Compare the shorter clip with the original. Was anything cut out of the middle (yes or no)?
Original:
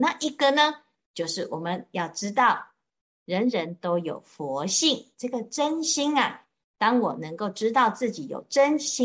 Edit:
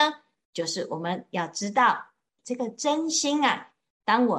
yes